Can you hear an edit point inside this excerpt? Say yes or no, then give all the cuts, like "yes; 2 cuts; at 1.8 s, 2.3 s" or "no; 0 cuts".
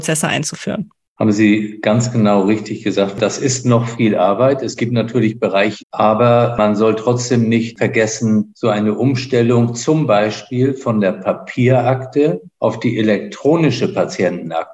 yes; 1 cut; at 5.8 s